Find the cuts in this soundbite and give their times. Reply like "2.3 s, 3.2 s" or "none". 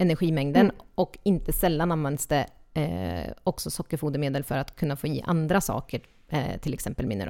none